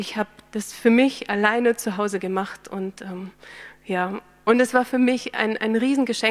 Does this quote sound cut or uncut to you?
uncut